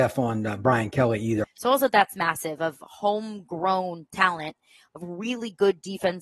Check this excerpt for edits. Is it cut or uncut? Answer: cut